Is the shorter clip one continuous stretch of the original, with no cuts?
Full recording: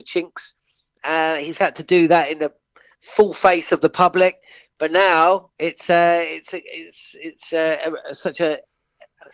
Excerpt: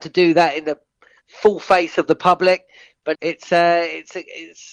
no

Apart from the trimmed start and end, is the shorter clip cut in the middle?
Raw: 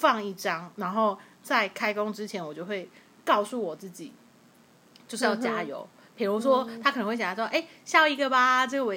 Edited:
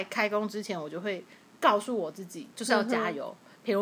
yes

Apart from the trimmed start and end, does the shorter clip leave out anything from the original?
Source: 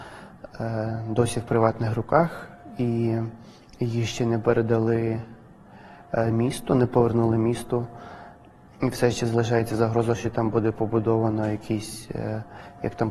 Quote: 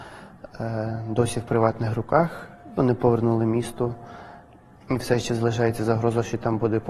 yes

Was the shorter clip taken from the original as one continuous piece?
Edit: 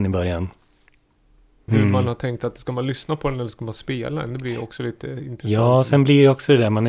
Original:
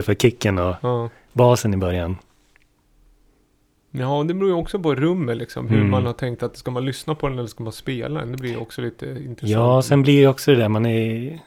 no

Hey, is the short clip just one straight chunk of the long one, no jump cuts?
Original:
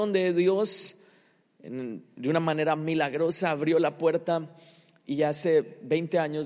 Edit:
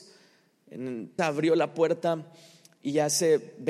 no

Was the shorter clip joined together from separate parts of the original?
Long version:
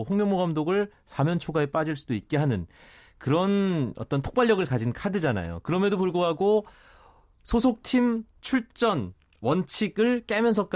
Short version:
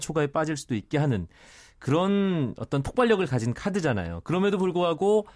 no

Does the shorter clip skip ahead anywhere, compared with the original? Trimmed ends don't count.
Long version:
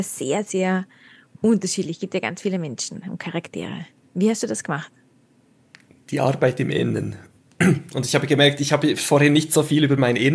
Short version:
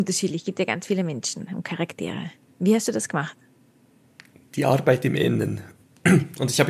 no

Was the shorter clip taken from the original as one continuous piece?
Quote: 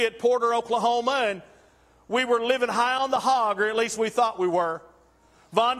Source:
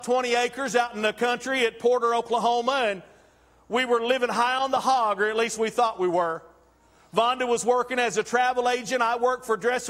yes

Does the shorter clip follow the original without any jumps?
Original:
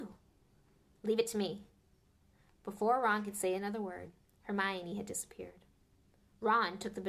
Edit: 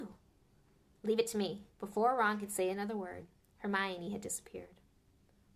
no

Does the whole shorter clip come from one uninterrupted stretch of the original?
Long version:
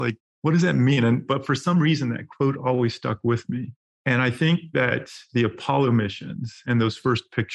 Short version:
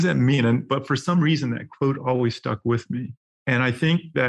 yes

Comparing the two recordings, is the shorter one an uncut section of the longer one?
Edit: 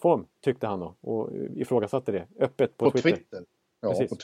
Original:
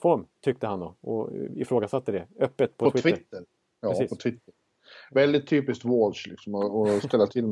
yes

